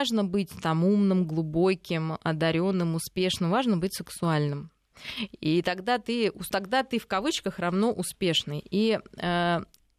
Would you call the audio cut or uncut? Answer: cut